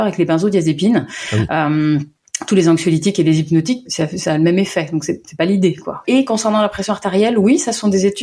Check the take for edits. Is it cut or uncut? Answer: cut